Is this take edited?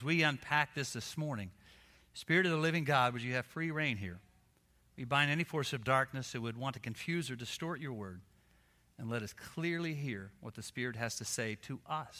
no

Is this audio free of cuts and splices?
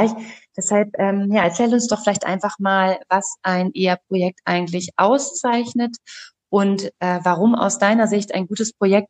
yes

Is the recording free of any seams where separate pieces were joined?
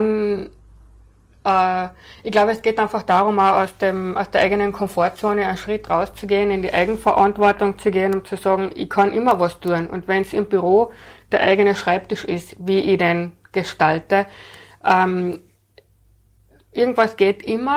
yes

